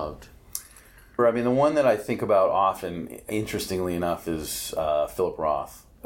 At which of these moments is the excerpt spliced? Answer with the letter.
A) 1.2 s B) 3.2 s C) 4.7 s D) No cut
A